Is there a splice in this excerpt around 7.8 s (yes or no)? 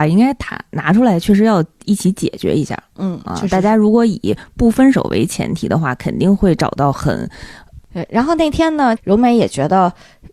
yes